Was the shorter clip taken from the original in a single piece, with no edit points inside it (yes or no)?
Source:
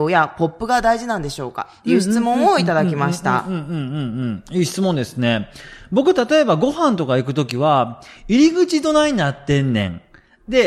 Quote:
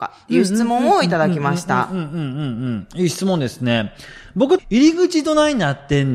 no